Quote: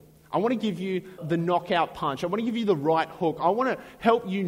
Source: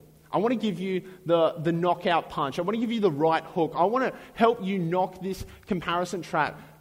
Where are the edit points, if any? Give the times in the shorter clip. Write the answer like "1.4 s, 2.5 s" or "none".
1.2 s